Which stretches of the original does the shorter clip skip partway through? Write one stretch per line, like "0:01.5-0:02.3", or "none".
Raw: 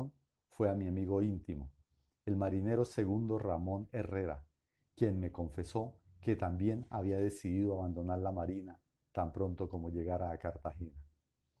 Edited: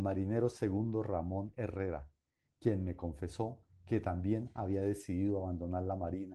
none